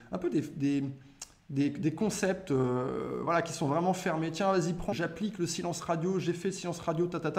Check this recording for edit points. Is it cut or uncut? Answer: cut